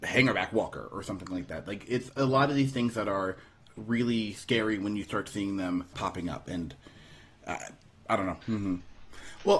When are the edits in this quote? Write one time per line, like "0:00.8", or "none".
0:05.9
0:08.4